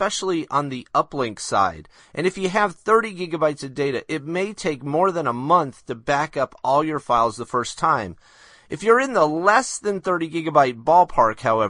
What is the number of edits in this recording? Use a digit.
1